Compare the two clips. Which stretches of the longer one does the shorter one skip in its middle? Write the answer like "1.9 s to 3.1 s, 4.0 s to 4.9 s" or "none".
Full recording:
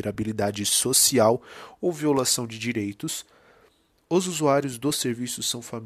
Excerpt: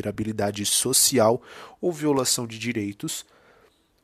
none